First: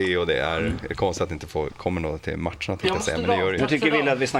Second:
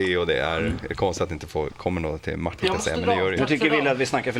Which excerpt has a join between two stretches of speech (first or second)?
second